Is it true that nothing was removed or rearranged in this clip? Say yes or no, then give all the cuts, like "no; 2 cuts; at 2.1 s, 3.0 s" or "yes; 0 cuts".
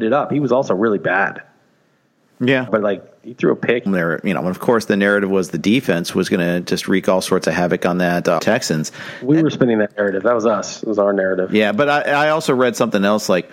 no; 3 cuts; at 2.7 s, 3.9 s, 8.4 s